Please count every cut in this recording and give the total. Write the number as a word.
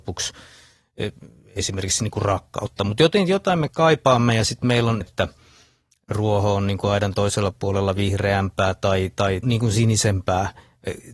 two